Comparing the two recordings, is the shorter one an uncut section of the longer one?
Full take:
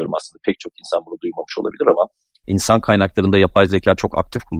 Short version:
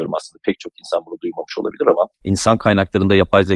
no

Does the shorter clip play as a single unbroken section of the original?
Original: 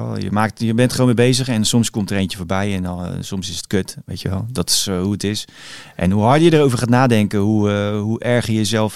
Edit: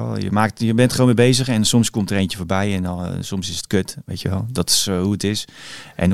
yes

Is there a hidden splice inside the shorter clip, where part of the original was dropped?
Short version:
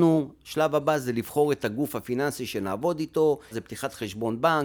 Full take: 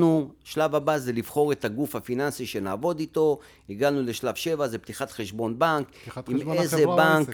yes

